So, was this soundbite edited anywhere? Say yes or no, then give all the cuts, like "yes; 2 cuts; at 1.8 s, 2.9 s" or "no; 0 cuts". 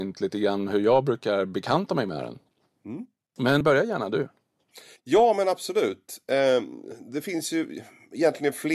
yes; 1 cut; at 3.6 s